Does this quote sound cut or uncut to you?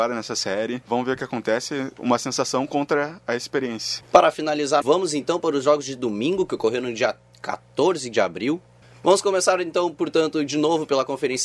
uncut